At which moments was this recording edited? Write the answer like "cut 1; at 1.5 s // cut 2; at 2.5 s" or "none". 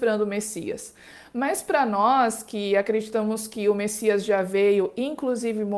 none

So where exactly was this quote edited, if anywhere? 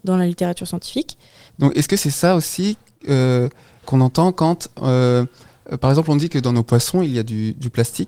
cut 1; at 1.5 s // cut 2; at 3.8 s

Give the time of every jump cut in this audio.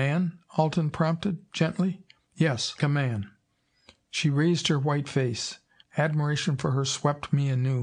cut 1; at 2.8 s // cut 2; at 5.8 s

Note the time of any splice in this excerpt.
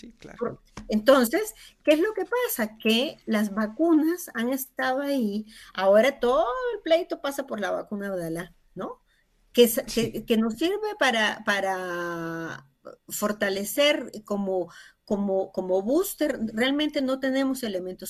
none

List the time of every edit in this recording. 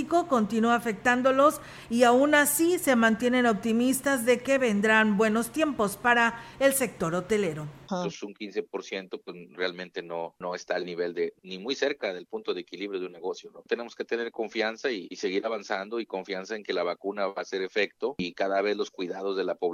cut 1; at 7.8 s

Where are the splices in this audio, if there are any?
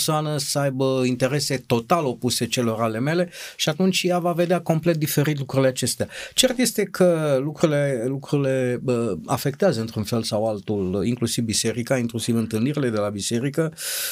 none

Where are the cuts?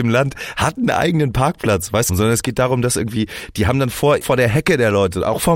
cut 1; at 2.1 s // cut 2; at 4.2 s

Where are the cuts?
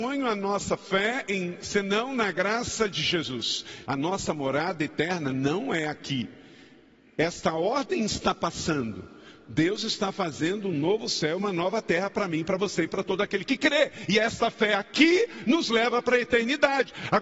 cut 1; at 3.8 s

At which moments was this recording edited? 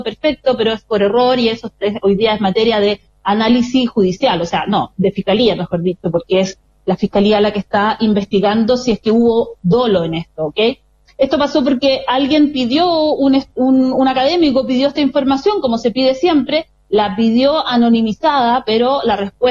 cut 1; at 11.1 s

